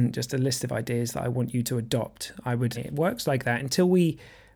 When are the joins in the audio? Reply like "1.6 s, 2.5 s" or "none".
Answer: 2.7 s